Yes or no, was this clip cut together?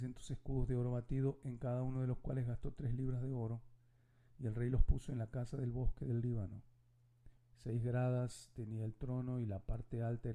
yes